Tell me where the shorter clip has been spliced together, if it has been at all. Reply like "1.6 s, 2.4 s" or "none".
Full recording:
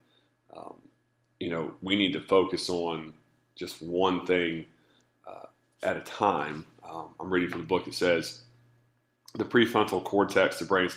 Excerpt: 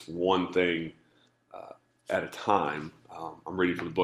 none